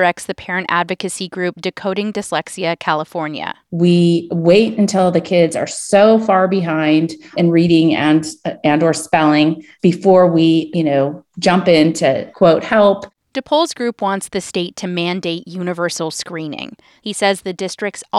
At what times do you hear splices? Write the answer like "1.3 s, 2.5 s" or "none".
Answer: 10.7 s, 17.0 s